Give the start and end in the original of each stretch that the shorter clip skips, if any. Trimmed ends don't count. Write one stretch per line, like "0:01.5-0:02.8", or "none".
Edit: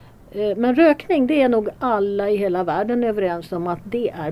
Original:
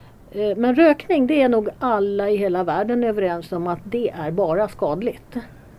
none